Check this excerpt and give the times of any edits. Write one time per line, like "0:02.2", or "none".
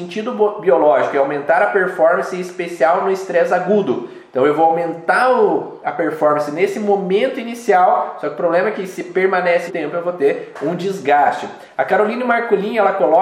0:09.7